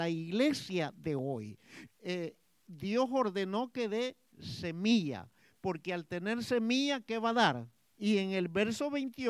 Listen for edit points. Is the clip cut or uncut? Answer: cut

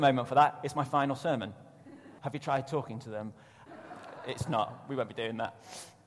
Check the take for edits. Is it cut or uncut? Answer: cut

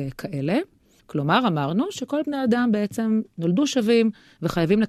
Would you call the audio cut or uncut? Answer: cut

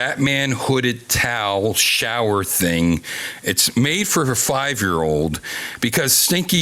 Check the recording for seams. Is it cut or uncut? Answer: uncut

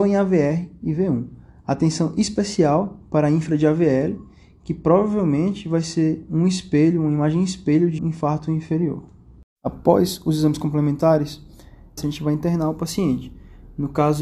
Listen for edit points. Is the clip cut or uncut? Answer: cut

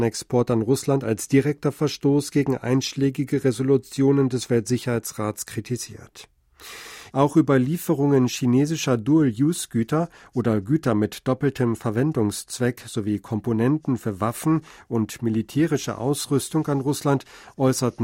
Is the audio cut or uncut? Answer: cut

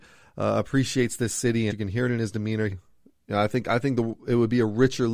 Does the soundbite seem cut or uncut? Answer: cut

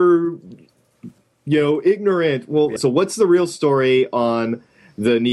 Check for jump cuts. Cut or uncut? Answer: cut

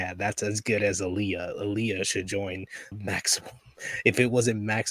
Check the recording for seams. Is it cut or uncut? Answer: cut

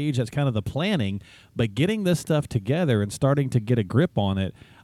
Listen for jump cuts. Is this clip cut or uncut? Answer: uncut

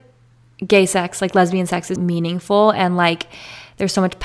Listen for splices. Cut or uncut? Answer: cut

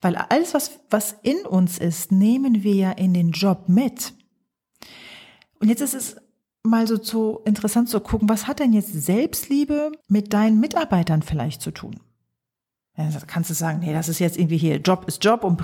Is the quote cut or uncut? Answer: cut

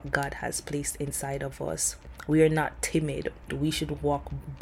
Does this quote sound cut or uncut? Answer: cut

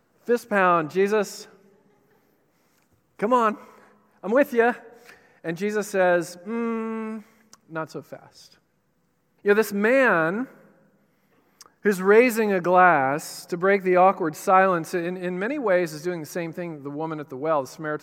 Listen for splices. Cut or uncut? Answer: cut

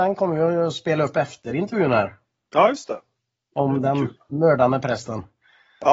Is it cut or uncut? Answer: uncut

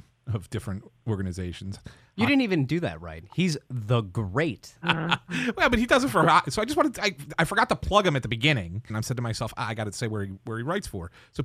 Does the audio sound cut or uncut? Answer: cut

